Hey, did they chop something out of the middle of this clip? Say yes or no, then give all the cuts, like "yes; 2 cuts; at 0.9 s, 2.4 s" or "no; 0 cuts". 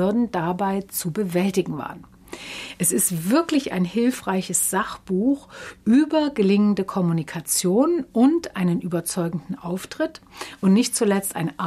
no; 0 cuts